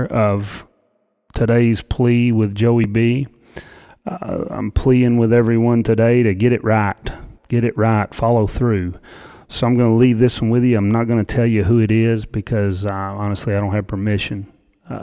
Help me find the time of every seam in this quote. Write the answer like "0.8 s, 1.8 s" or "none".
none

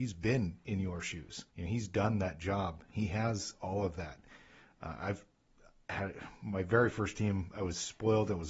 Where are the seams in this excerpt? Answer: 1.5 s

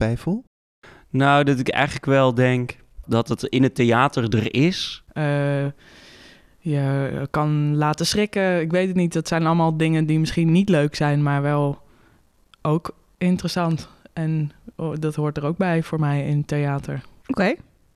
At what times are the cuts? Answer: 3.0 s, 5.1 s

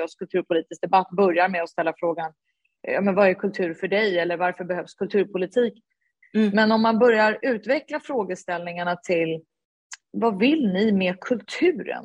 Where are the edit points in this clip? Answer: 6.2 s, 10.0 s

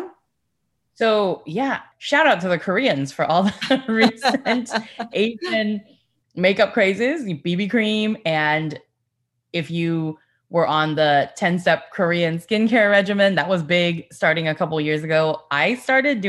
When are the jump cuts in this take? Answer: none

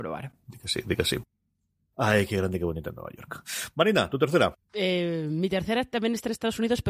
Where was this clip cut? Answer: 4.6 s

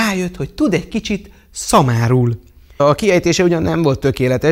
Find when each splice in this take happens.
2.8 s

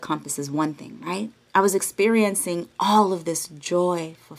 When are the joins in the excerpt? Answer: 1.5 s

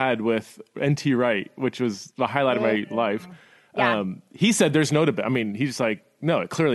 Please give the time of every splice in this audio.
none

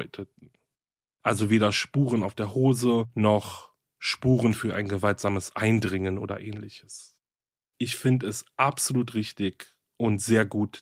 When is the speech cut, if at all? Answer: 7.7 s

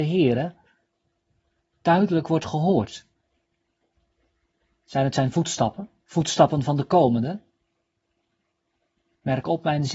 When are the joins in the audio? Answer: 6.0 s

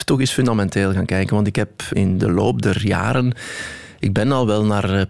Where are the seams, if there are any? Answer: 1.9 s

